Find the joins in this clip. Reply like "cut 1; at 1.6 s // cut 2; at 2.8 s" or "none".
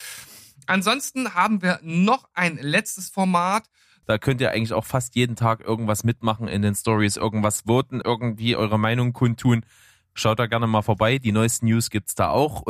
cut 1; at 4.0 s // cut 2; at 8.0 s